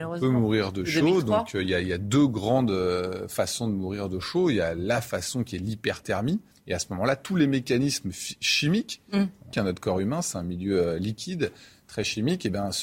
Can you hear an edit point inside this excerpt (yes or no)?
yes